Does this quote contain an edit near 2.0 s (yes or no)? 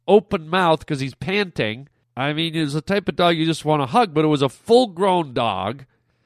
yes